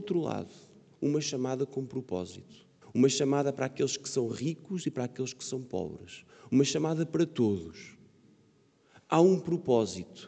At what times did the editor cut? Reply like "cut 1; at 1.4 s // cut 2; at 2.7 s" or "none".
cut 1; at 2.8 s